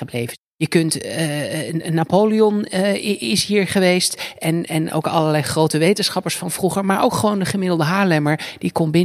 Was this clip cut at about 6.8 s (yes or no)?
no